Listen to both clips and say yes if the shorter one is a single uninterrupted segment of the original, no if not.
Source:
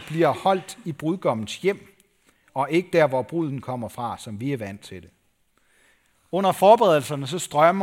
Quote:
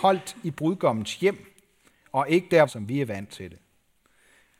no